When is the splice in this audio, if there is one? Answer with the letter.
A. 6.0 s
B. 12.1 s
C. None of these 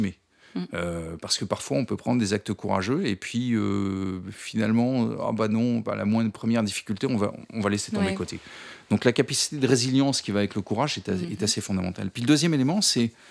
C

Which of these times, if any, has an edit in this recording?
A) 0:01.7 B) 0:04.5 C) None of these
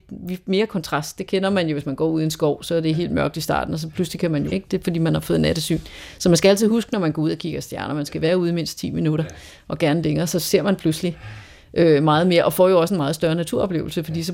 B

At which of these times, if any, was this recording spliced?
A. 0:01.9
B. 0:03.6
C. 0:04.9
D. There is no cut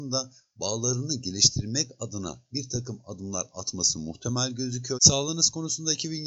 C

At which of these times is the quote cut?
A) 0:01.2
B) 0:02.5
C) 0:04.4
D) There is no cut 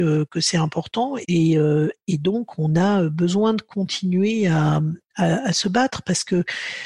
A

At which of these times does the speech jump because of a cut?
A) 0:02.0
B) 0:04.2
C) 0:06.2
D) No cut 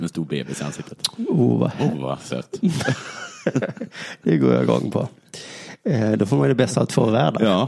D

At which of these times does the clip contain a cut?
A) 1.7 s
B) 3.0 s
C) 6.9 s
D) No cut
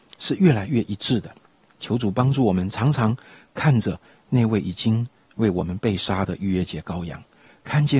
A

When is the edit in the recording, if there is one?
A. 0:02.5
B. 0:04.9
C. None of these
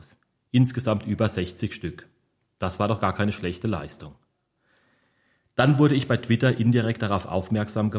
C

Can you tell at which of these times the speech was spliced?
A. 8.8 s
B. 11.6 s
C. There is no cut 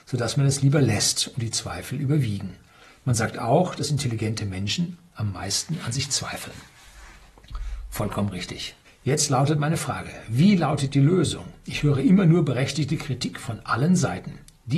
A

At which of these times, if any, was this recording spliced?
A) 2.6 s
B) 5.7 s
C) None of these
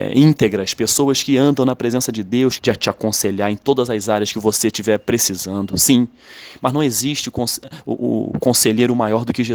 A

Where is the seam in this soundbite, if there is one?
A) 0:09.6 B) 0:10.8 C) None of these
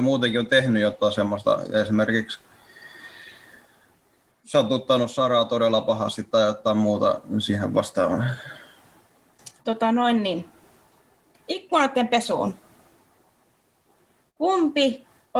A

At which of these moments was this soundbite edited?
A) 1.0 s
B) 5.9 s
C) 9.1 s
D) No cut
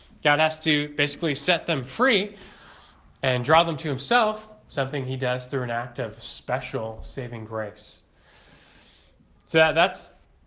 D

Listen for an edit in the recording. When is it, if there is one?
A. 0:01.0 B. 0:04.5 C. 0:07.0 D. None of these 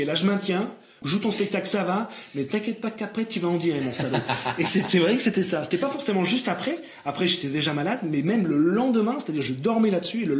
A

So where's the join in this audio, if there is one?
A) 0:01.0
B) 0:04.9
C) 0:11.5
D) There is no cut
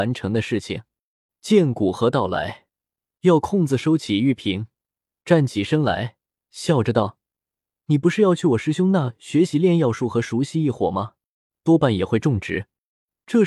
C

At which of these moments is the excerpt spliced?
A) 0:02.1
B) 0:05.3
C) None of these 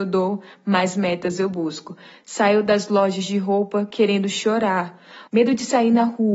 B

